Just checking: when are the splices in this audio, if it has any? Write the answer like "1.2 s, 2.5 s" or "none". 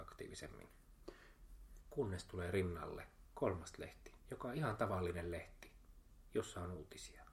1.8 s, 4.2 s